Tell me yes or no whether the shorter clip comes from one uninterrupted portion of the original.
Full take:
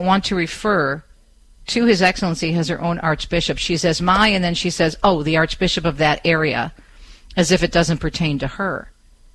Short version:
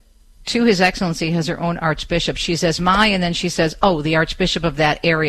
yes